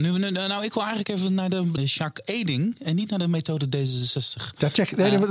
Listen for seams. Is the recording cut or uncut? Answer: cut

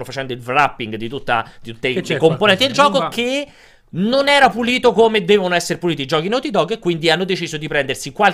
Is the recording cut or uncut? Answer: uncut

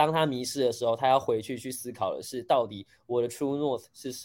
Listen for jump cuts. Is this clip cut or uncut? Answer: uncut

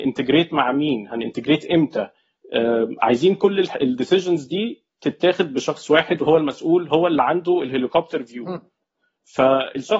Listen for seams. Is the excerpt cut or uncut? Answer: uncut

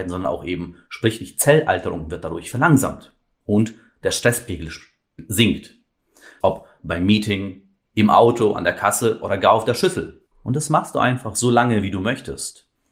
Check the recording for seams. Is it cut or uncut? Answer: cut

